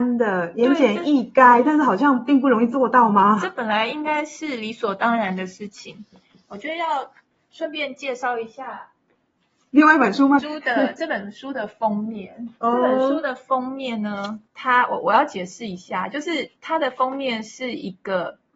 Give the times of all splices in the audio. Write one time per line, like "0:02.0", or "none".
0:10.4
0:14.5